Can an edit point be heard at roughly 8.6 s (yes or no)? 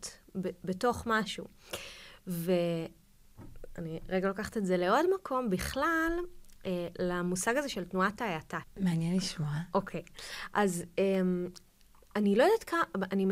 yes